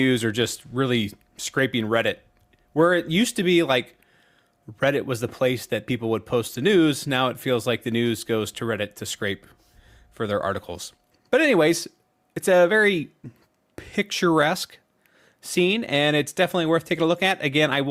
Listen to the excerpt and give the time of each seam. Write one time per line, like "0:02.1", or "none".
none